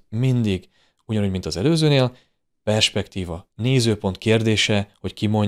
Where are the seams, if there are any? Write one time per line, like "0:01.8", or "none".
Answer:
none